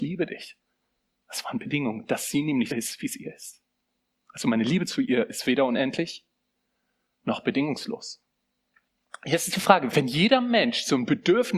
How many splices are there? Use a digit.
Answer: 2